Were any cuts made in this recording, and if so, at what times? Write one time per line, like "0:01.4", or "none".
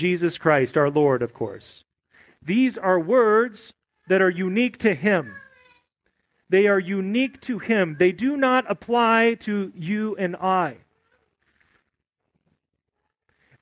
none